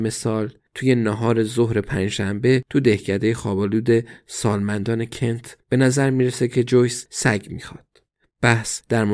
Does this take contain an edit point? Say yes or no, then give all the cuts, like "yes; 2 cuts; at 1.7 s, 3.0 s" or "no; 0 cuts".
no; 0 cuts